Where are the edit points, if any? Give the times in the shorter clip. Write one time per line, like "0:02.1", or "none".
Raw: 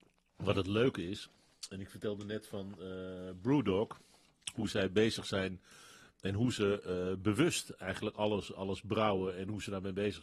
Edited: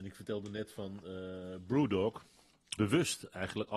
0:02.8